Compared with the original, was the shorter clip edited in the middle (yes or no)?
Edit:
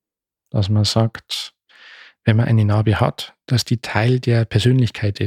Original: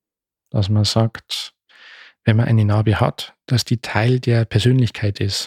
no